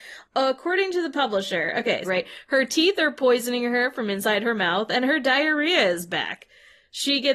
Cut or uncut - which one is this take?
cut